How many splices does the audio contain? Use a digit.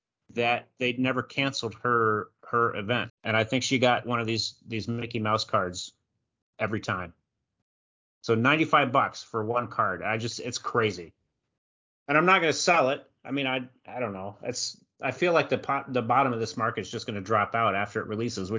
1